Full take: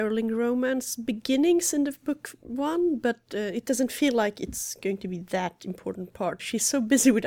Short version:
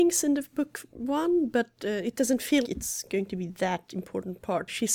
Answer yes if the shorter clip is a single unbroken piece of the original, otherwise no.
no